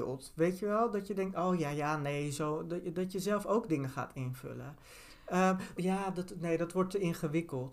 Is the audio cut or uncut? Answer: cut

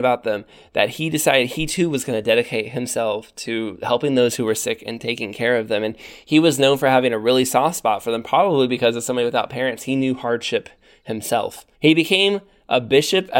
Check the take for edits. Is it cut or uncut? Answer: cut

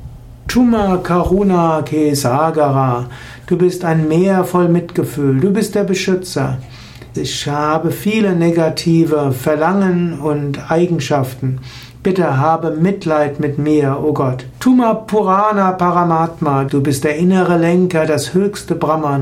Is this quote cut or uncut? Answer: cut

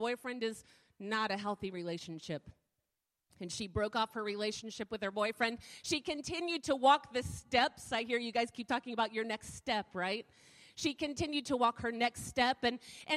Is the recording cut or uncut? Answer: uncut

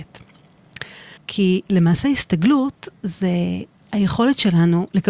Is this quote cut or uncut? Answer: cut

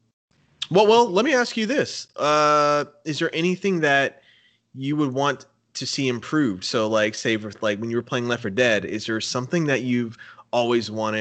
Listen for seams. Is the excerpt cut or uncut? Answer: uncut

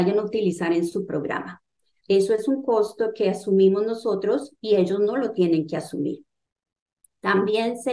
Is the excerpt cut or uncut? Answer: cut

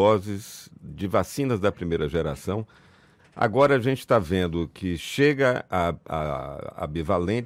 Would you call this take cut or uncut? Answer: cut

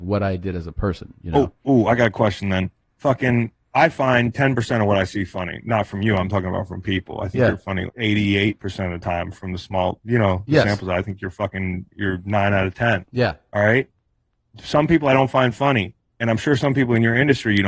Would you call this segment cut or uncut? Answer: cut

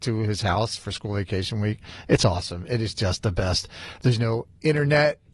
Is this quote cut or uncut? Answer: uncut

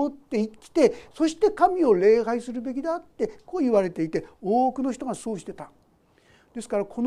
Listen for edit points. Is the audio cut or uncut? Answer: uncut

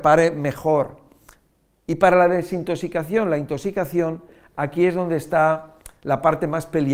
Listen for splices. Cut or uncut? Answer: uncut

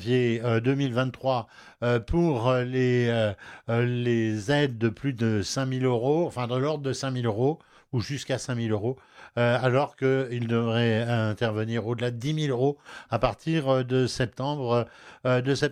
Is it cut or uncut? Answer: uncut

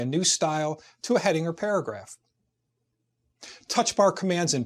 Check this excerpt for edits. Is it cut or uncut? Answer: uncut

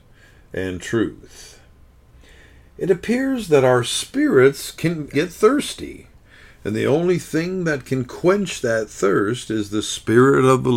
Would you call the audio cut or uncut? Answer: cut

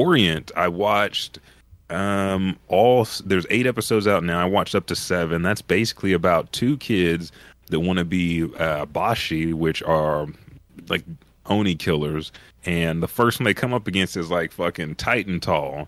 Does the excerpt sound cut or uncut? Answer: uncut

